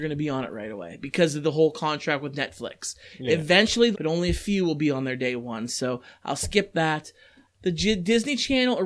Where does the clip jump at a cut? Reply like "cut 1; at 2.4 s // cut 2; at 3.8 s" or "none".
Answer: cut 1; at 3.9 s // cut 2; at 7.4 s